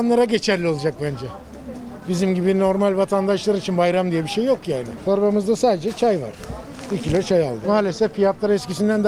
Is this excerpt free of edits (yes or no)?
yes